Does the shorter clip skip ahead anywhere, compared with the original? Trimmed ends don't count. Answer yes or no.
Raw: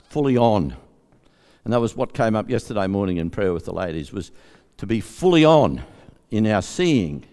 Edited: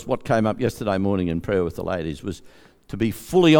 no